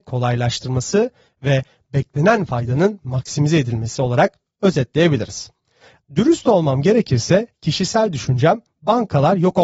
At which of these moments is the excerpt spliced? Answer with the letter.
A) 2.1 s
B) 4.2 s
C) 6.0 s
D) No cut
C